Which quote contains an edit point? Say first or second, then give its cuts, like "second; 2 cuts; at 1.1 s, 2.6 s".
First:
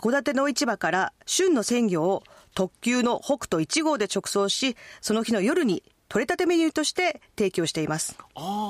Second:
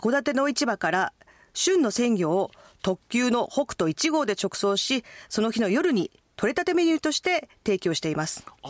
first; 1 cut; at 1.2 s